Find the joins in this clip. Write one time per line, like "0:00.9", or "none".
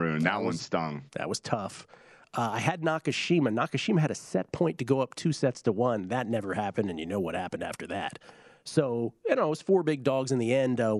0:01.1